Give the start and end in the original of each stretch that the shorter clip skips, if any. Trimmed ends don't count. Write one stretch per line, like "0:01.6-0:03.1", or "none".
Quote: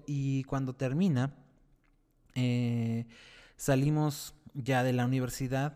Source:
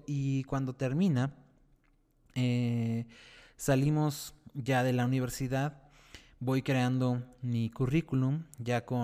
none